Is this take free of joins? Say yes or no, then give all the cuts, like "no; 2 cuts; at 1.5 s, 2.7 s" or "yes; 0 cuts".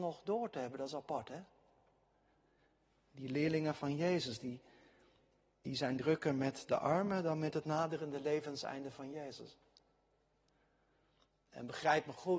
yes; 0 cuts